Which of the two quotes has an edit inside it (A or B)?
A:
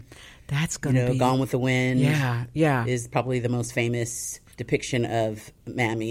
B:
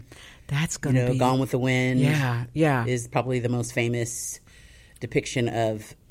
A